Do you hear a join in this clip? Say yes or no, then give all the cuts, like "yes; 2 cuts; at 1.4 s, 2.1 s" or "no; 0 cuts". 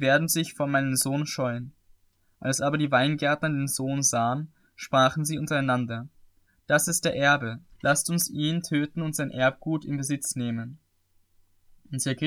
yes; 1 cut; at 7.7 s